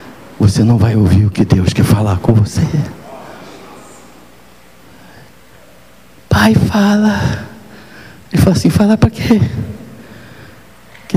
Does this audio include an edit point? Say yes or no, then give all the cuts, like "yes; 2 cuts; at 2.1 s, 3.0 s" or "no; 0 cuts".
no; 0 cuts